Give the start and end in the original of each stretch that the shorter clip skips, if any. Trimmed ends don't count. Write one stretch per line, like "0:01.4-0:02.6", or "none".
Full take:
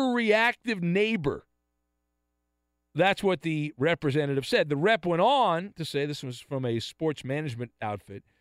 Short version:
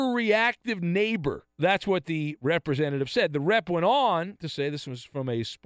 0:01.5-0:02.9